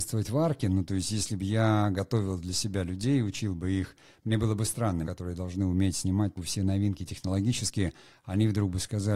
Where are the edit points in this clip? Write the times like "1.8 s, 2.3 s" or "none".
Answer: 5.0 s, 6.4 s